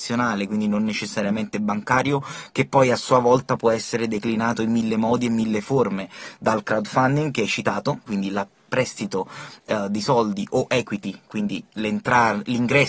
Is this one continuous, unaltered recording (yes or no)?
no